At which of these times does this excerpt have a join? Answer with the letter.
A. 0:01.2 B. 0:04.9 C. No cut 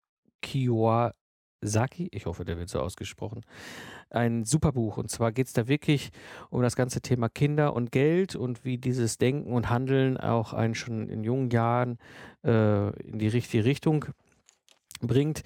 C